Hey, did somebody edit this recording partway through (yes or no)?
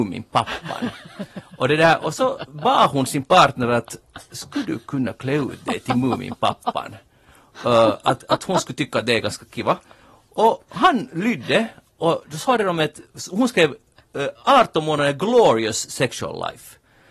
no